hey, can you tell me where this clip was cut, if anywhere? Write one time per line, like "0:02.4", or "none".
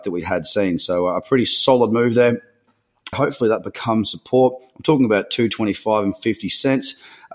0:03.1